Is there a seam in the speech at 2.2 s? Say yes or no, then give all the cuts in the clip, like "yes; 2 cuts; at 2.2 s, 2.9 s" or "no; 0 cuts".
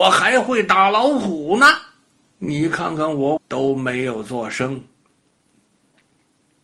yes; 2 cuts; at 2.2 s, 3.4 s